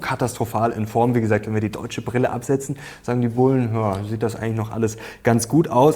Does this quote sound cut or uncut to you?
uncut